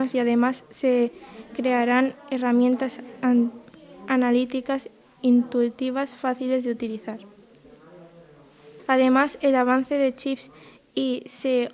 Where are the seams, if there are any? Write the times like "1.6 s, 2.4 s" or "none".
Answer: 8.8 s